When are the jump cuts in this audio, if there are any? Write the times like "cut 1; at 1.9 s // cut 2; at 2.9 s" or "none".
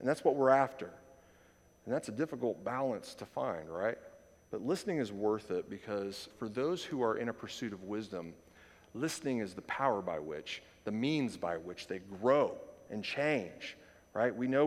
cut 1; at 4.4 s // cut 2; at 6.3 s